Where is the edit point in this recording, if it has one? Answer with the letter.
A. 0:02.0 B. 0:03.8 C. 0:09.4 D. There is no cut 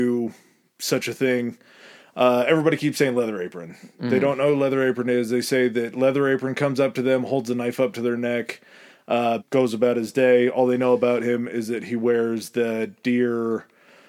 C